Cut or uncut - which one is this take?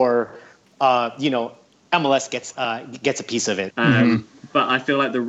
cut